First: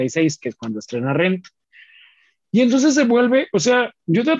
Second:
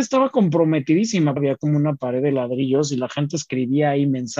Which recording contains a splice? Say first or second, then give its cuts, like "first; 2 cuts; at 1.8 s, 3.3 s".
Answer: second; 1 cut; at 1.4 s